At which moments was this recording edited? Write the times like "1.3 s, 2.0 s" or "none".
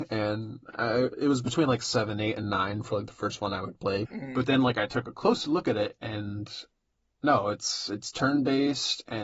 4.1 s